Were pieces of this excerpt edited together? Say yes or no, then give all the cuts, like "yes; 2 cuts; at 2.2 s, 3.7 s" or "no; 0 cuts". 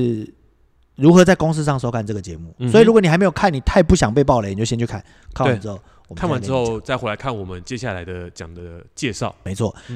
no; 0 cuts